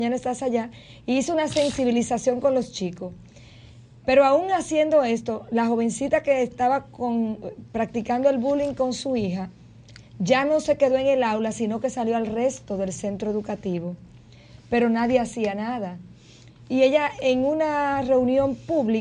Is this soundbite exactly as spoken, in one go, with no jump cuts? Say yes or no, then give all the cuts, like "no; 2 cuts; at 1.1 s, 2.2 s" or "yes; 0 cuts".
yes; 0 cuts